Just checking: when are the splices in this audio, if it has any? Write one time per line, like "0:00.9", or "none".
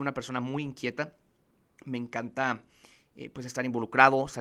none